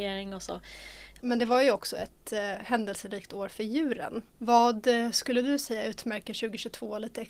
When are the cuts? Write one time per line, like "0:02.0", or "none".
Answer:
0:01.2
0:04.3